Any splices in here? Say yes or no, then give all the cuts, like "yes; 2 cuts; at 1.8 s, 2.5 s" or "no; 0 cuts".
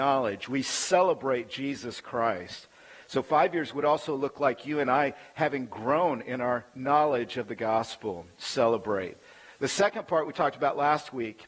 no; 0 cuts